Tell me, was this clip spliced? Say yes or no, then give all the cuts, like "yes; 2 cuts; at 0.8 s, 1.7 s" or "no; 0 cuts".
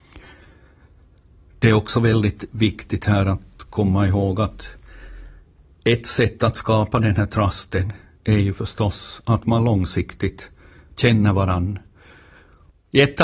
no; 0 cuts